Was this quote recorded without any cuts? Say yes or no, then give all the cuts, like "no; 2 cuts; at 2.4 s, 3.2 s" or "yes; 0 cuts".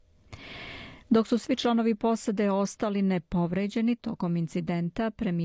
yes; 0 cuts